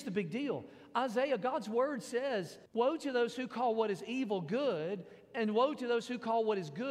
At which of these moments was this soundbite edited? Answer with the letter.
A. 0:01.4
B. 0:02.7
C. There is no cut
B